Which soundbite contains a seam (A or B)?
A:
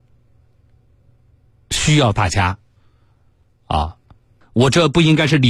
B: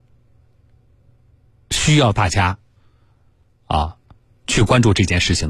A